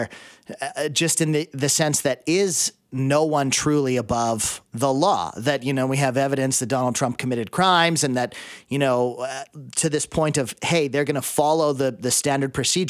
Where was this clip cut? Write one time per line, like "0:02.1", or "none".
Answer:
none